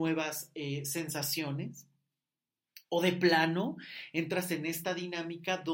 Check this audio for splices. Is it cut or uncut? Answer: uncut